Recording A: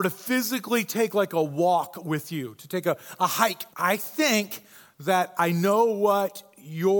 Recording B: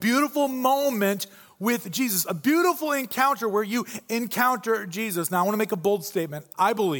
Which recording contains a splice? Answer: A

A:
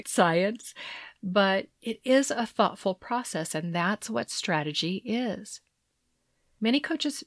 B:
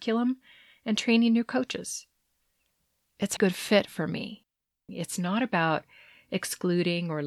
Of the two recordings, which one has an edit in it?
B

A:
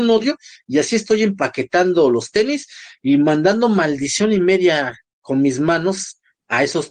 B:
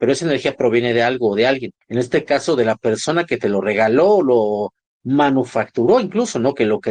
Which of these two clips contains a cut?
B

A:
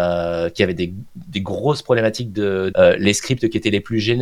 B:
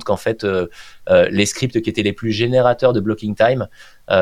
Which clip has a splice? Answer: A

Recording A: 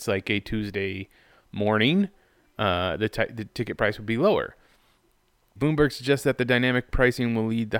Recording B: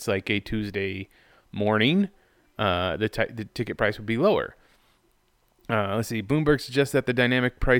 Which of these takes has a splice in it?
A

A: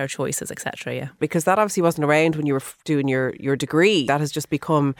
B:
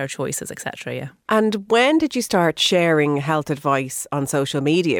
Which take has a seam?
A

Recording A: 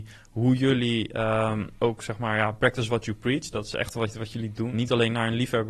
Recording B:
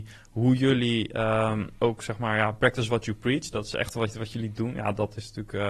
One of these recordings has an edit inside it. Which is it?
A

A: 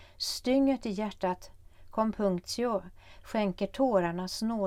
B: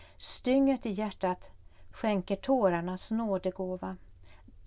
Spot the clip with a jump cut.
B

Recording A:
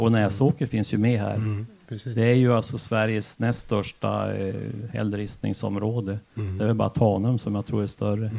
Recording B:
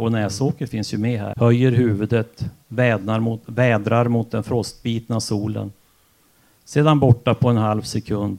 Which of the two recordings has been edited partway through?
B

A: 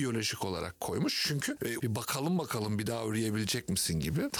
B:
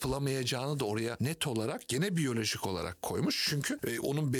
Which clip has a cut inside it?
A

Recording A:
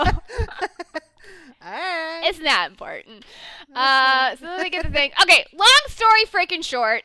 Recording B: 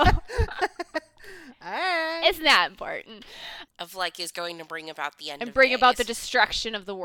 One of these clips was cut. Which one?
B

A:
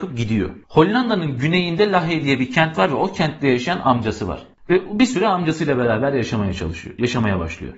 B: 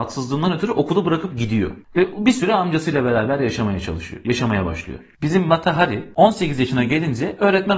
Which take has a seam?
B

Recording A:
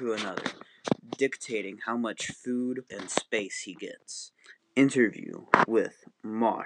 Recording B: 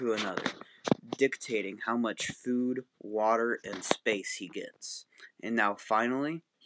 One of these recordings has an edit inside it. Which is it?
A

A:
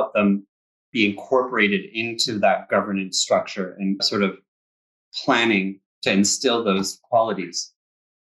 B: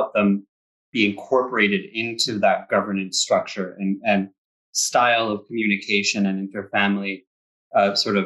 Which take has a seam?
A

